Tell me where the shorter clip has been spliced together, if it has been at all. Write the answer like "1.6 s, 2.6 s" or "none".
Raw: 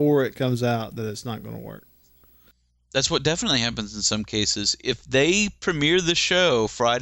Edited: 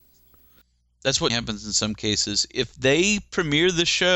1.3 s